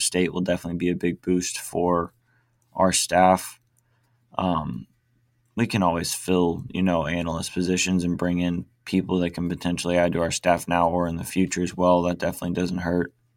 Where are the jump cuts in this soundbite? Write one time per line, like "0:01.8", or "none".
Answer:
none

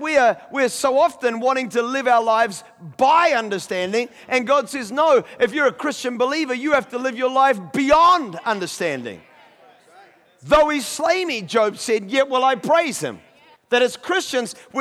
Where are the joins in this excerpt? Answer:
0:13.6

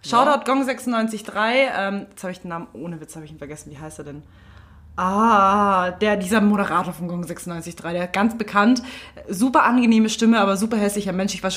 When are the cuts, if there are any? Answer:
none

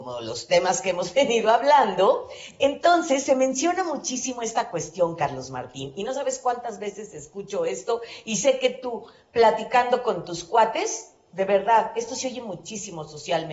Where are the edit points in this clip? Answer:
none

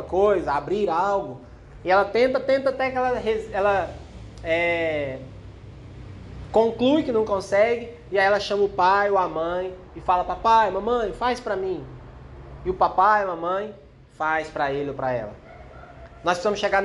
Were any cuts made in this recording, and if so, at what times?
0:02.7

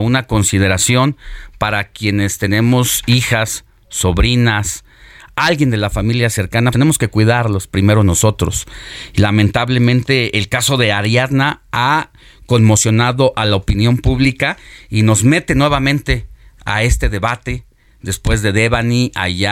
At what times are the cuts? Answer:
0:06.7

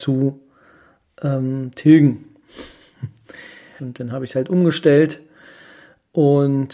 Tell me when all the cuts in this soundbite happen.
0:03.8

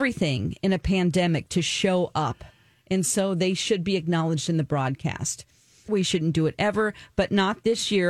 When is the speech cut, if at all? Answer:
0:05.9

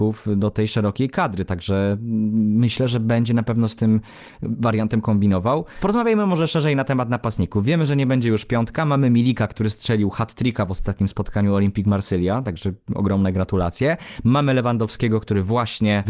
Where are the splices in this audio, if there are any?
none

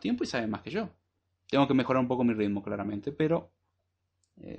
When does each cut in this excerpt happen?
0:01.3

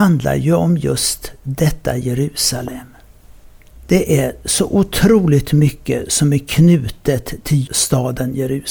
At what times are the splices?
0:07.7

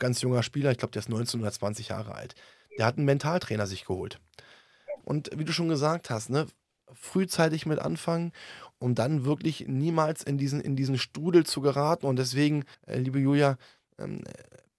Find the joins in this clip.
0:05.0
0:12.7

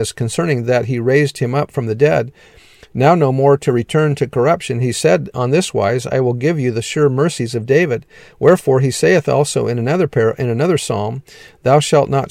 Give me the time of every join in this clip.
none

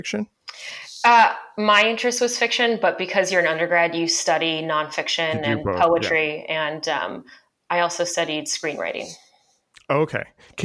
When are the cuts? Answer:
none

